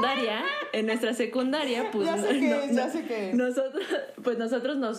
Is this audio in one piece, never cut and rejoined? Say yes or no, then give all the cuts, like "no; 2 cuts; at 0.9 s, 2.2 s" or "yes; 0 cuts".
yes; 0 cuts